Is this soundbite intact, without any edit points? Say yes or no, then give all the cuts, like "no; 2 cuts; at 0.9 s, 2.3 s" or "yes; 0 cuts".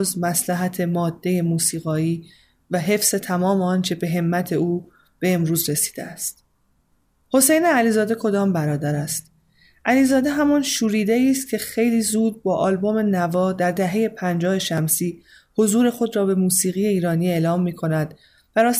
yes; 0 cuts